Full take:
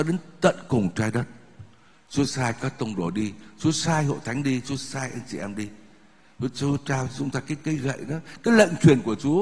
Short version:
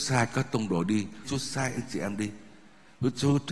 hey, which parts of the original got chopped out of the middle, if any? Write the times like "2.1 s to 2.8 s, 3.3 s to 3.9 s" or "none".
3.5 s to 4.6 s